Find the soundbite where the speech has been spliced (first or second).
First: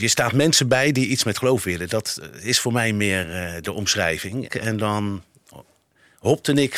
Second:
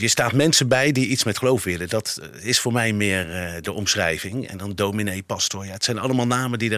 first